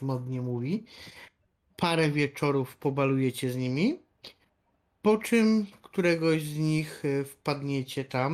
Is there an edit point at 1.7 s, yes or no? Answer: yes